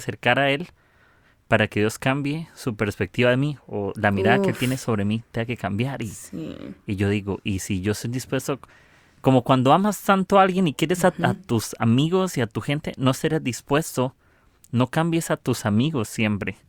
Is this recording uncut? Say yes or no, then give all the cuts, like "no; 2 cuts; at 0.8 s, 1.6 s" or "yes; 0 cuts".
yes; 0 cuts